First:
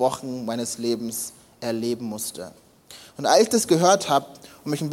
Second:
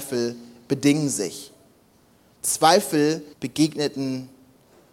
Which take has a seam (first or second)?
second